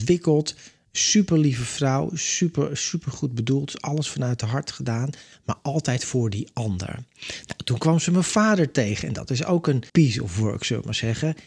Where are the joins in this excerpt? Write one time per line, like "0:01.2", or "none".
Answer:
0:09.9